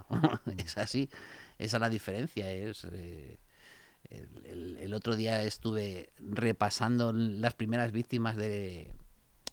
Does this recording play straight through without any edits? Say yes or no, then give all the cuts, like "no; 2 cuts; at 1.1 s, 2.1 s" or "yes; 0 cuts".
yes; 0 cuts